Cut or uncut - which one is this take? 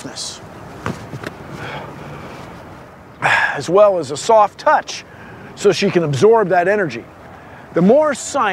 uncut